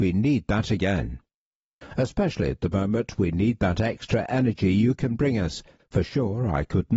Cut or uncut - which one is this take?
cut